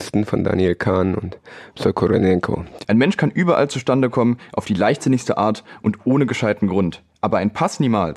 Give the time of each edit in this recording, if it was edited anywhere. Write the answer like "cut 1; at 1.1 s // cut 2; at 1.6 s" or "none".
cut 1; at 2.8 s